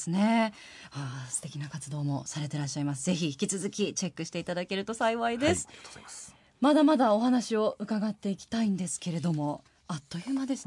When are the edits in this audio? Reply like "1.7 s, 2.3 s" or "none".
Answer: none

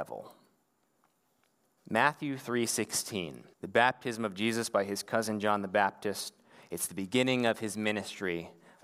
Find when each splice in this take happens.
1.8 s, 3.5 s

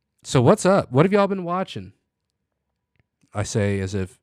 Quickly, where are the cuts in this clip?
none

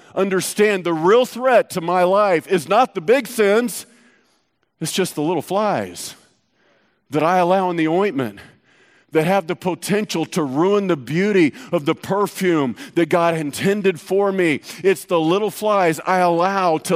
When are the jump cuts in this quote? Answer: none

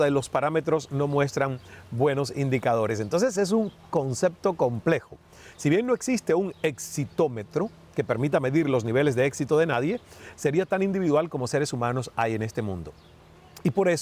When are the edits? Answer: 10.3 s

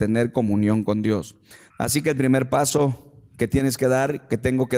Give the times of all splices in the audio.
1.7 s

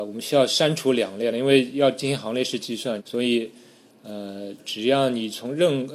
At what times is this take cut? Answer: 3.0 s, 4.6 s

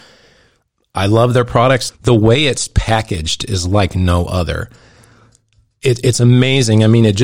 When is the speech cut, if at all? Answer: 1.9 s

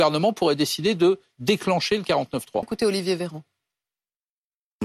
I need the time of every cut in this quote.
2.6 s

